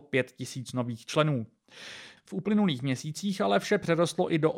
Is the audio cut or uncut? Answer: cut